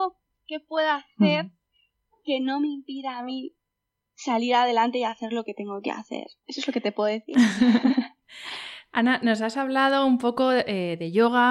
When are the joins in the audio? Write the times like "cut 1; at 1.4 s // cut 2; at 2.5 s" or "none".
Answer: cut 1; at 6.4 s